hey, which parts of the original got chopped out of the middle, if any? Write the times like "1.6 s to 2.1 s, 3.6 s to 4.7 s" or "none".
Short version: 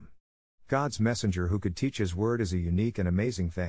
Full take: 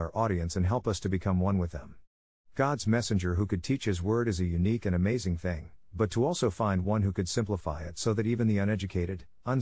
none